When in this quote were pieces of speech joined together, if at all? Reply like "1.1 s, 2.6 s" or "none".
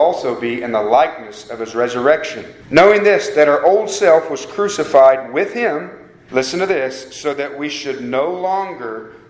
2.6 s, 6.3 s